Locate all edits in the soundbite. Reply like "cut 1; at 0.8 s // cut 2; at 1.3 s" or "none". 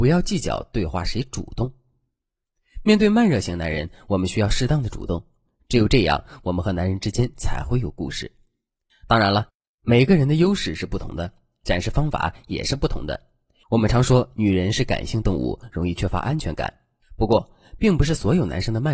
cut 1; at 8.9 s // cut 2; at 13.6 s // cut 3; at 17.0 s